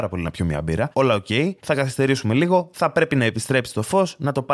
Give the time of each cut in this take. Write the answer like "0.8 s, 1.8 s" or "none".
0.9 s, 2.7 s